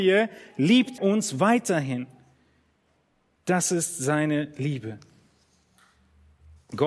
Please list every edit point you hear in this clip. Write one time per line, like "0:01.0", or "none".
0:01.0
0:03.4

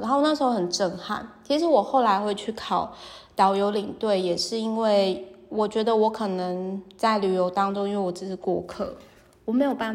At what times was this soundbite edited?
none

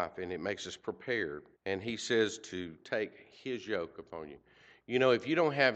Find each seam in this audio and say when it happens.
0:01.5

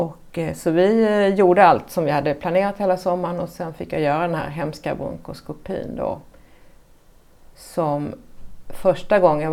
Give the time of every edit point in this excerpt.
none

